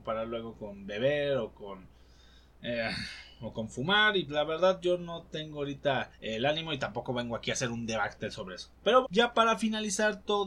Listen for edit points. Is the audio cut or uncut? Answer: cut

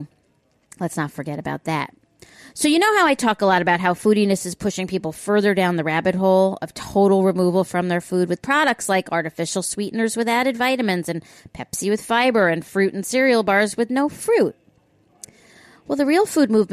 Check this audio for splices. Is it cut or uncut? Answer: uncut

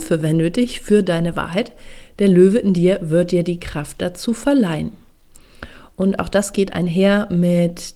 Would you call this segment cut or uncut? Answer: uncut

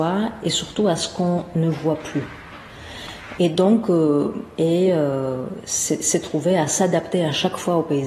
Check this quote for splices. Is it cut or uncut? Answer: cut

